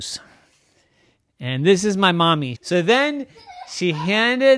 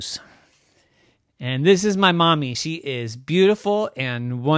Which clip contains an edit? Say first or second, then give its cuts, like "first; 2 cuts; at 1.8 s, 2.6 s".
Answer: first; 1 cut; at 2.5 s